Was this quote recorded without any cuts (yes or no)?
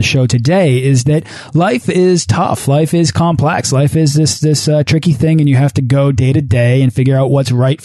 yes